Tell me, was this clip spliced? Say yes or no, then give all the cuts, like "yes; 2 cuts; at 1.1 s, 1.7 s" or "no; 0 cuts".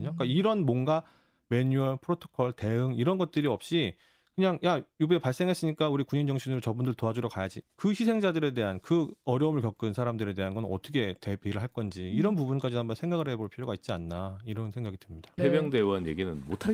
yes; 2 cuts; at 7.6 s, 15.4 s